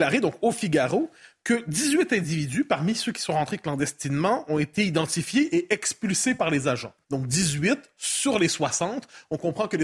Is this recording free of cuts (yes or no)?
no